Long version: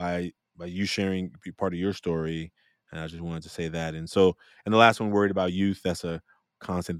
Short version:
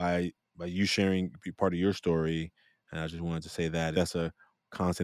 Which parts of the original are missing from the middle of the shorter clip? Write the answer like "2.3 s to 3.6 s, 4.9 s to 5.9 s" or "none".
3.9 s to 5.8 s